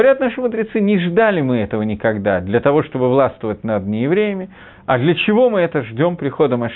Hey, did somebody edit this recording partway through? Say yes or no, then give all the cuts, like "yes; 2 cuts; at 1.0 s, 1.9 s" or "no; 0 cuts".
no; 0 cuts